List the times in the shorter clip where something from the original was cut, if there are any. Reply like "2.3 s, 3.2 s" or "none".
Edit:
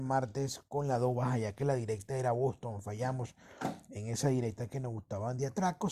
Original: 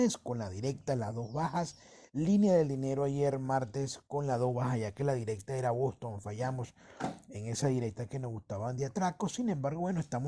none

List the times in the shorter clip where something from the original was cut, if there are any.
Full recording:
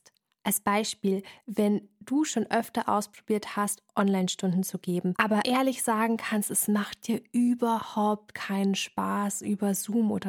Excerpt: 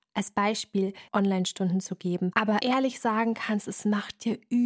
1.1 s

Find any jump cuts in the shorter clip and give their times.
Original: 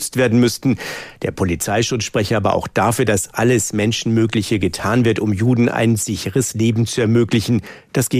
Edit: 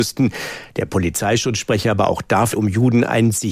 2.5 s

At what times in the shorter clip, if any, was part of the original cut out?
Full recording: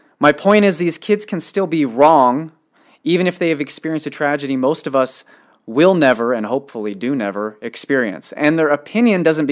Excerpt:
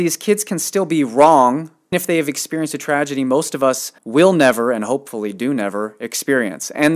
1.9 s, 4.0 s

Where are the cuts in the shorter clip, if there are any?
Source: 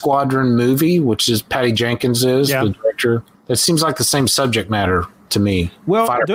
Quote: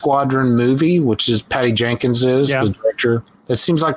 none

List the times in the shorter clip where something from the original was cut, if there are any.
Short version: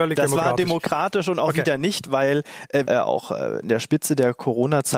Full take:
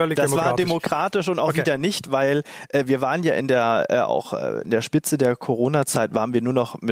2.9 s

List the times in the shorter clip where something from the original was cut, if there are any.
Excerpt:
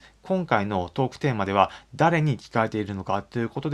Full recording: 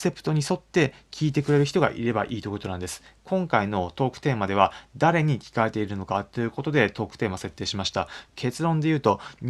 none

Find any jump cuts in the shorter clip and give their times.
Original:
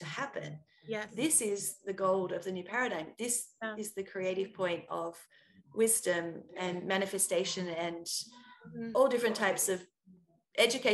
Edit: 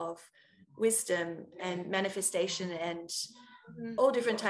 none

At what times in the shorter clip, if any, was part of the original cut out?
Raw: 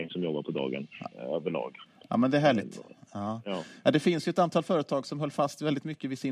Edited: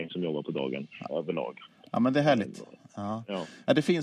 1.1 s

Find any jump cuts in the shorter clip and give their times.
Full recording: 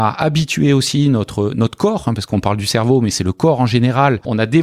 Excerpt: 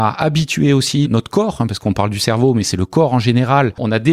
1.0 s

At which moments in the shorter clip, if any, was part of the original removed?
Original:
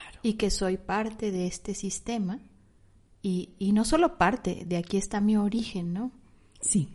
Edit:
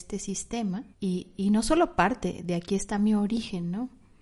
0.9 s

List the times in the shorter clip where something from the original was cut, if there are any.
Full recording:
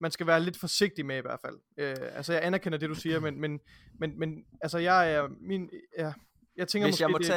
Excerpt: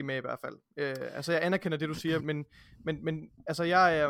2.2 s

